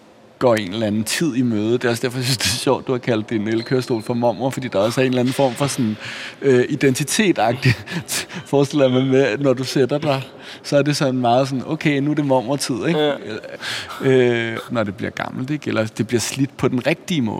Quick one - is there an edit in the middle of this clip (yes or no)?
yes